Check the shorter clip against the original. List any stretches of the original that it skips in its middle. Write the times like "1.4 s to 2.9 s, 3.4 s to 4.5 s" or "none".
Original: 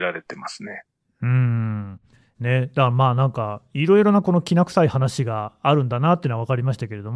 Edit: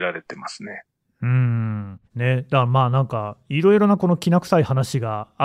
2.1 s to 2.3 s